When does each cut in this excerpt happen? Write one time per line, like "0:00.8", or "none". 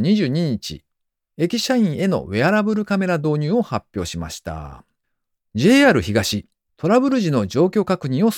0:05.4
0:06.7